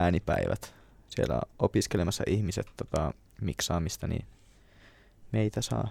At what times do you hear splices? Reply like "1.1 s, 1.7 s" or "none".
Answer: none